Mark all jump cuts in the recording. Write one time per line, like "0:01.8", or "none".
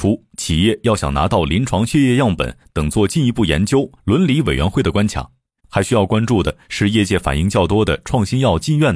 0:04.0
0:05.6